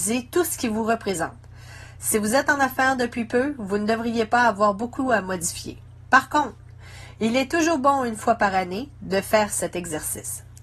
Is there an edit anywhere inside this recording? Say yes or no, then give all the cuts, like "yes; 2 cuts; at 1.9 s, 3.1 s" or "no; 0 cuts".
no; 0 cuts